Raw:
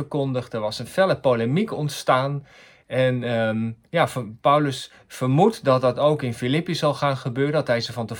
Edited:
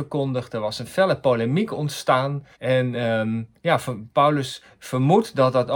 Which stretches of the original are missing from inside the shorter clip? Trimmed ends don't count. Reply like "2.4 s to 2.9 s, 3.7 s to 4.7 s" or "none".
2.5 s to 2.8 s